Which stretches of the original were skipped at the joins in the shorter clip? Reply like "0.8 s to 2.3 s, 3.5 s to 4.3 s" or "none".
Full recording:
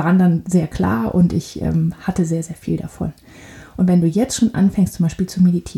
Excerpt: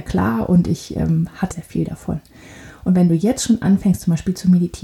2.2 s to 2.4 s

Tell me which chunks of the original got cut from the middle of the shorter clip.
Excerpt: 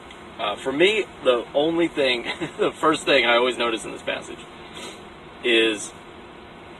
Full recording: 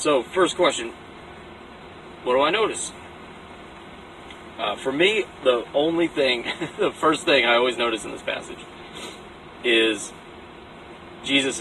none

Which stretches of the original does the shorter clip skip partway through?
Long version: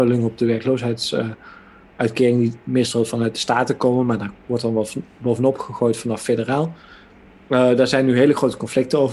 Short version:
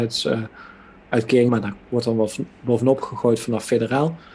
2.4 s to 4.1 s

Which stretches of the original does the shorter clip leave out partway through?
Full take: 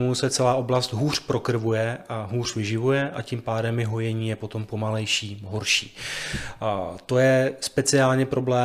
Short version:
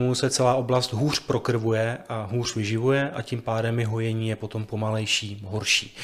none

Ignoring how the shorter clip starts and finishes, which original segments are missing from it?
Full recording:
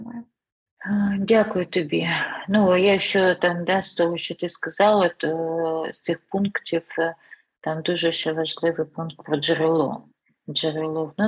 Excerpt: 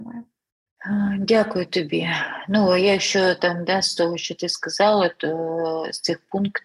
none

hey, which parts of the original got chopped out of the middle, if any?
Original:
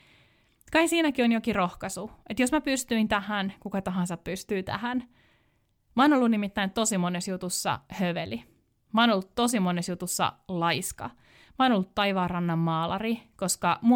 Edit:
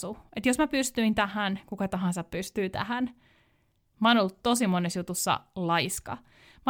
5.8 s to 8.8 s

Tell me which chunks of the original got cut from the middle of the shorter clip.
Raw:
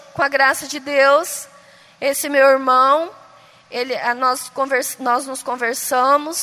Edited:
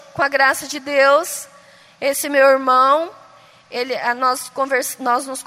none

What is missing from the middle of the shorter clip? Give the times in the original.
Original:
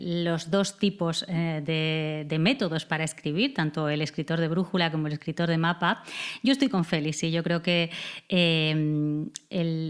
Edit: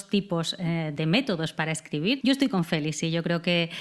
1.7 s to 2.3 s, 3.5 s to 6.4 s

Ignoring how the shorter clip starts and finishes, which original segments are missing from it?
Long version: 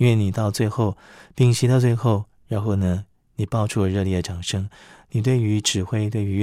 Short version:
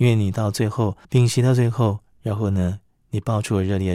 1.0 s to 1.3 s

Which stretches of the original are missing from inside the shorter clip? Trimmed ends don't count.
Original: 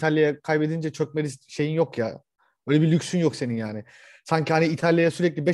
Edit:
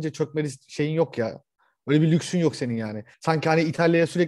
3.9 s to 4.2 s

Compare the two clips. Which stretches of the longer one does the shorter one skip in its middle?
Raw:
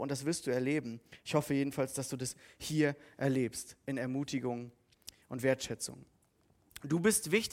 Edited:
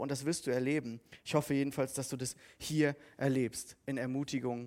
none

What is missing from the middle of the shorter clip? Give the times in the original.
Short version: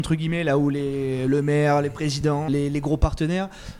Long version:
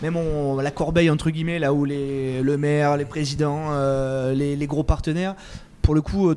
3.6 s to 4.3 s

